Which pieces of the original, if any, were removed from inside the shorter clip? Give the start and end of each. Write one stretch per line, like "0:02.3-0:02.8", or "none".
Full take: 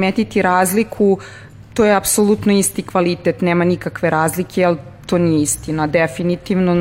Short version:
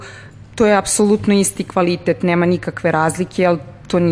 none

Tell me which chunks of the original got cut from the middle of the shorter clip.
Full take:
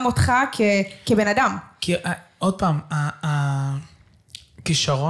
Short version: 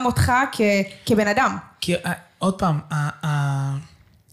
none

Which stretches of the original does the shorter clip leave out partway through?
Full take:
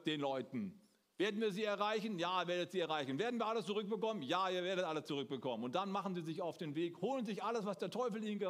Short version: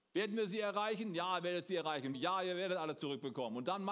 0:03.2-0:04.2

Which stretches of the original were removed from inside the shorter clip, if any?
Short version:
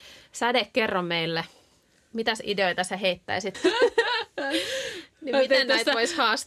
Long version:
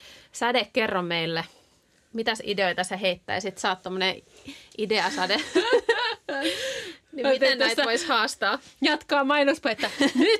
0:03.5-0:05.5

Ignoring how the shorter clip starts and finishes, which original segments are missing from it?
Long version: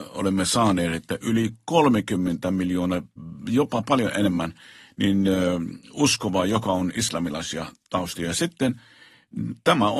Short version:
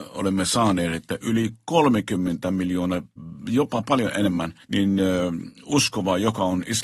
0:04.6-0:04.9

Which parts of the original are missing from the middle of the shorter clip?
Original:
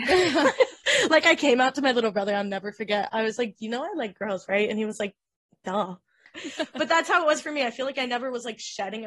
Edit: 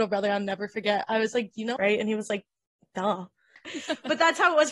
0:03.8-0:04.5

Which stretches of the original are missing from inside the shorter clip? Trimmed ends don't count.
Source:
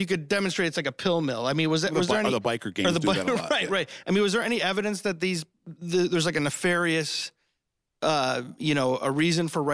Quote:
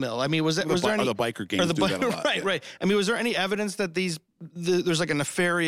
none

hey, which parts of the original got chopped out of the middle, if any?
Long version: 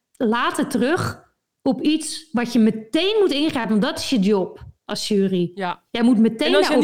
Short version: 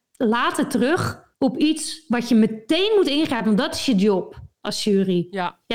0:01.3-0:01.6

